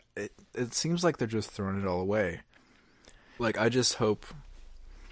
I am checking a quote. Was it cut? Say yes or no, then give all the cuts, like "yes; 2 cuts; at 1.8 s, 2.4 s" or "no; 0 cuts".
yes; 1 cut; at 3.4 s